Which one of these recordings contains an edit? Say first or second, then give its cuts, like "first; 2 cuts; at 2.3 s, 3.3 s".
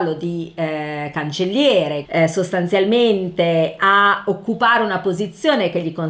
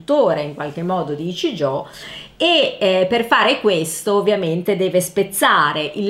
first; 1 cut; at 2.0 s